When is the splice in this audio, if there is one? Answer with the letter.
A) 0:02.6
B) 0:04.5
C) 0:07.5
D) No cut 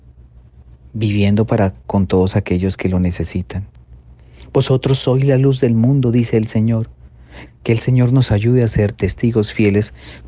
C